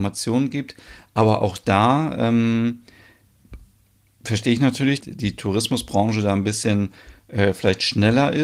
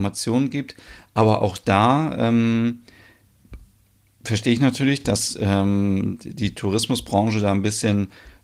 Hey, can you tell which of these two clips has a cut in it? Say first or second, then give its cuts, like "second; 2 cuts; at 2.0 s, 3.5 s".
first; 1 cut; at 5.0 s